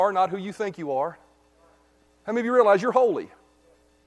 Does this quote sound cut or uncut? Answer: uncut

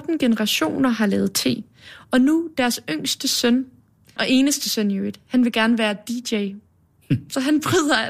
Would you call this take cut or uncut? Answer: cut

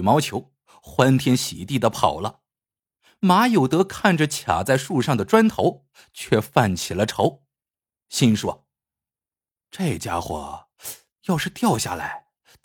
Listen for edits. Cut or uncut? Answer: uncut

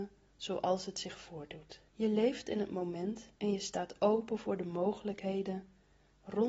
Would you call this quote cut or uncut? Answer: cut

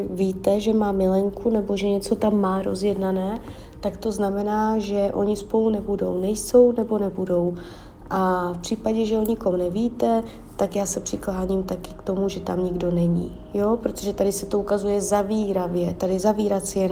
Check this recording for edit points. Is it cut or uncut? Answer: uncut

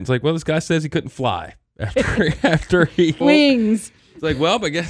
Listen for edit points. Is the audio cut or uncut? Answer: cut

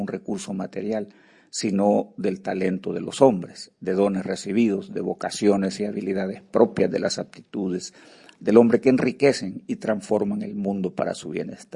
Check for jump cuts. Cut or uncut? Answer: uncut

